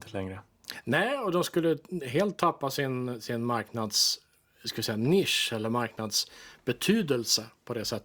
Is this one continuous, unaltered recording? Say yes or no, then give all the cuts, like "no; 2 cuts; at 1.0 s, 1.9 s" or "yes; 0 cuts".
yes; 0 cuts